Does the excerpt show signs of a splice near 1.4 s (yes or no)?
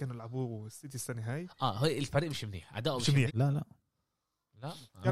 no